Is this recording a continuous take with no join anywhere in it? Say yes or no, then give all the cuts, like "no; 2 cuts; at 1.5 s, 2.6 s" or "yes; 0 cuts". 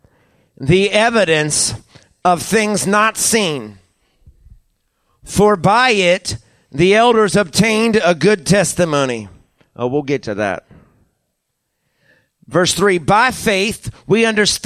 yes; 0 cuts